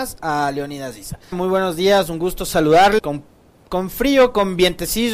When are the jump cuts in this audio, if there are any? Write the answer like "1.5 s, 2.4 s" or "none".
1.3 s, 3.0 s